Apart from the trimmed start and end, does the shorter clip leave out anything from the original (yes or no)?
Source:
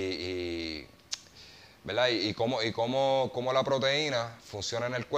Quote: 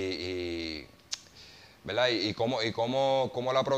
no